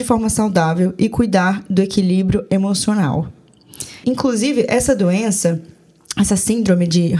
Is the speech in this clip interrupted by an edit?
yes; 1 cut; at 4.0 s

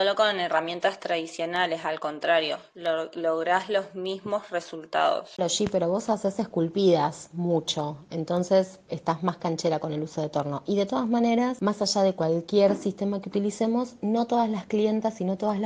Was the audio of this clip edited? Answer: no; 0 cuts

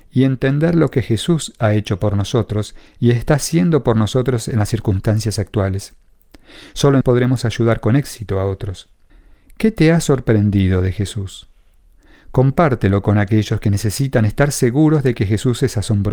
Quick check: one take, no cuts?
no; 1 cut; at 7.0 s

